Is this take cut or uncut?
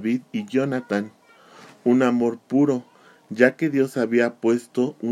uncut